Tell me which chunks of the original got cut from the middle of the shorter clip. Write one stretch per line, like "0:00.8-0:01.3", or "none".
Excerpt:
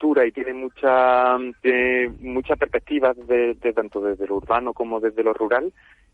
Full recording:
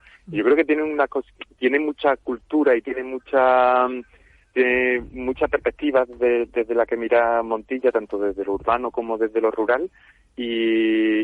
0:04.1-0:04.5
0:06.7-0:07.9